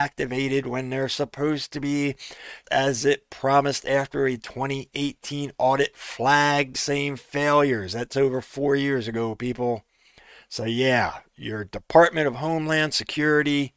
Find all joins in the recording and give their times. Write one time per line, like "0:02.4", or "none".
0:02.6
0:06.7